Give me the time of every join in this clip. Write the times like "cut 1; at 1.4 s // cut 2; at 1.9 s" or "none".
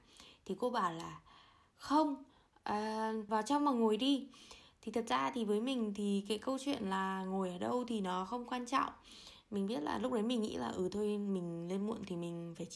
cut 1; at 3.3 s